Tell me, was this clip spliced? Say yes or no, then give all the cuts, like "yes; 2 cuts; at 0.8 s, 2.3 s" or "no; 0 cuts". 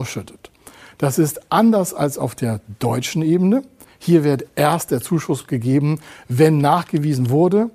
no; 0 cuts